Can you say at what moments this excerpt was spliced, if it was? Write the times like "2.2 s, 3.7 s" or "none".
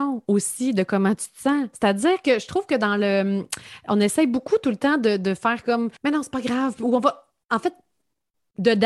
6.0 s